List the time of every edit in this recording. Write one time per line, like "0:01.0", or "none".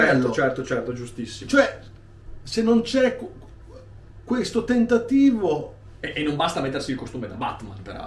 none